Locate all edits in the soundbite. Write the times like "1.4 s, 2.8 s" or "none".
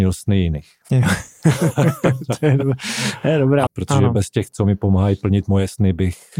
3.7 s

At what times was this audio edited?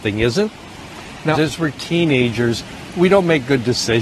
1.3 s

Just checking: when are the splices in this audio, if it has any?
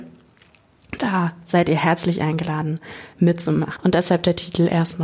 3.8 s

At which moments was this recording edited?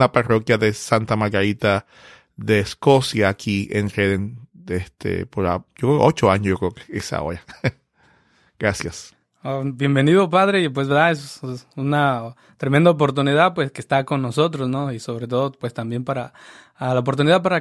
none

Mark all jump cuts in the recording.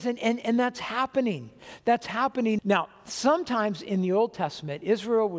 2.6 s

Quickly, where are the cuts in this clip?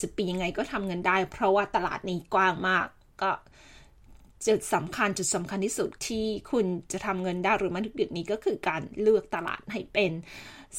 6.0 s

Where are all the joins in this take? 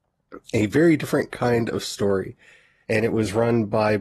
2.8 s

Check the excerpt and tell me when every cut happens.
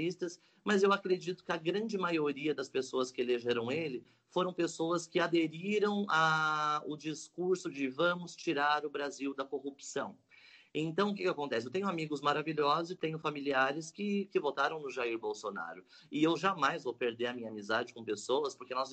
none

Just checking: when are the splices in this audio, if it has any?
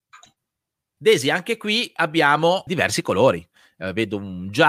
1.0 s, 2.7 s

